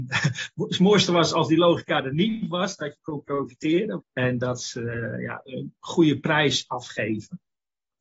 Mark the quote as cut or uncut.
cut